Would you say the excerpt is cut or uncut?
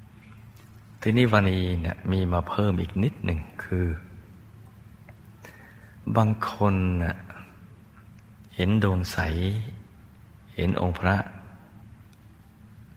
cut